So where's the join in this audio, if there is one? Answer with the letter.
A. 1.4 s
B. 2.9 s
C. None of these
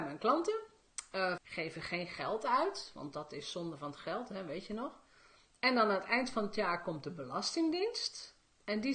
A